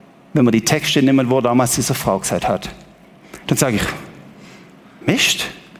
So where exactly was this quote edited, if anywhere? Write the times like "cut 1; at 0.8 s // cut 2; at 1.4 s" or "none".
cut 1; at 3.4 s